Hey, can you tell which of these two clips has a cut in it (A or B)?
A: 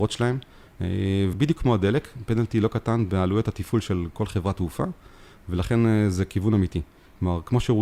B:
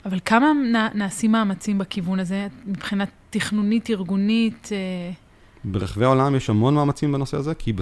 A